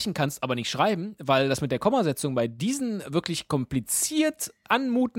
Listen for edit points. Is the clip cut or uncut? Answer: uncut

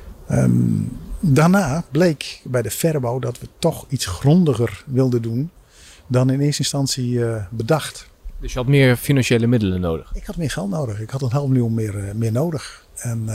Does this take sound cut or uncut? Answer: uncut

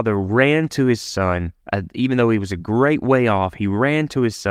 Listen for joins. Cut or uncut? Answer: cut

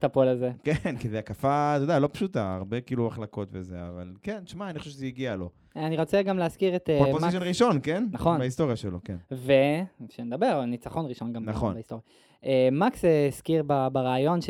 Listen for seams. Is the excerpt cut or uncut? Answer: uncut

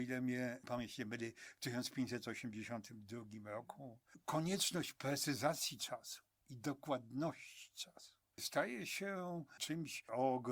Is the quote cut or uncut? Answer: uncut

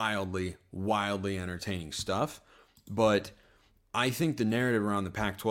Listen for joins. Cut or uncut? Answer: uncut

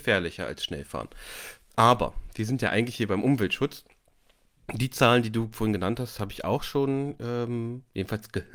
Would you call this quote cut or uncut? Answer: uncut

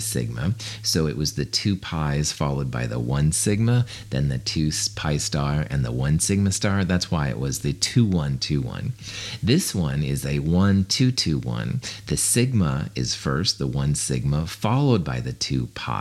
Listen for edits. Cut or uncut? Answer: uncut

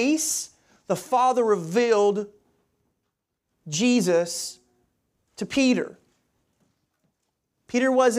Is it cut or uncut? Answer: uncut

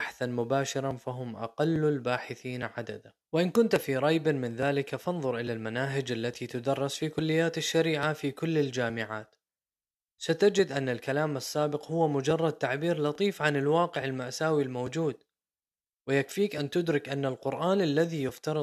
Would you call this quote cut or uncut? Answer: cut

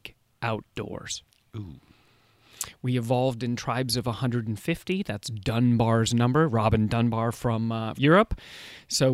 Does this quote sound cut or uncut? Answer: cut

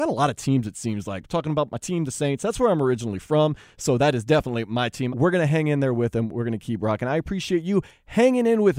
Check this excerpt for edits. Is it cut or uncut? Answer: cut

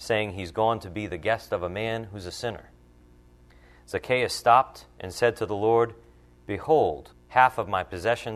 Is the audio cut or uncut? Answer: cut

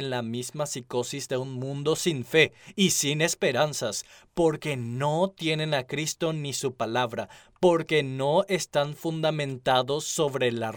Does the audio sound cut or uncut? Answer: uncut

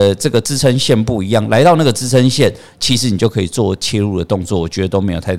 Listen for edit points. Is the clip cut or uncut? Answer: uncut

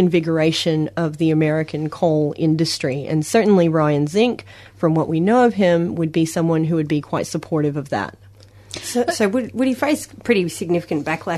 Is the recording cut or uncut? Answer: uncut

